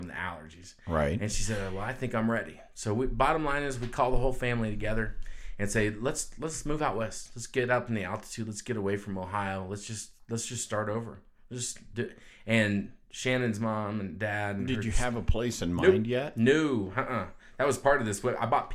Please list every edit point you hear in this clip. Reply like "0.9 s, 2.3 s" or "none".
none